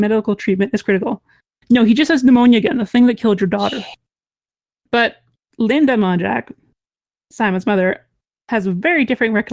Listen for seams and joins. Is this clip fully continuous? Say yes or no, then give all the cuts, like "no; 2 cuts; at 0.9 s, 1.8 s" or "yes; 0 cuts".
no; 1 cut; at 1.6 s